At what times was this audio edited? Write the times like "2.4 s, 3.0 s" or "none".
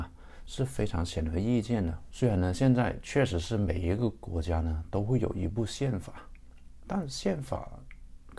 2.1 s